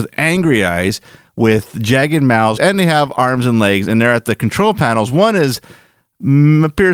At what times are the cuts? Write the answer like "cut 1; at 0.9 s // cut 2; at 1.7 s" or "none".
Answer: cut 1; at 2.6 s